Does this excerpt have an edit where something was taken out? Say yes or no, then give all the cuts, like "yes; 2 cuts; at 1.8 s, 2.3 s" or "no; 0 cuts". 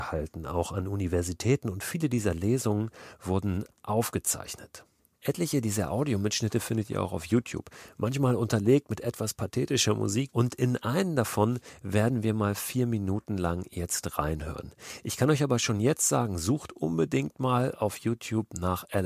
yes; 1 cut; at 10.3 s